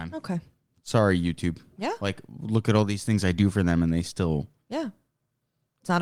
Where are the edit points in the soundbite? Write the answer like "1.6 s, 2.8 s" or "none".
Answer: 1.8 s